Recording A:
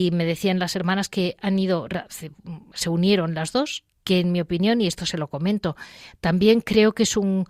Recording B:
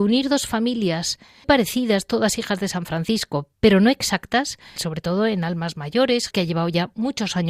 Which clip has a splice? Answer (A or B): B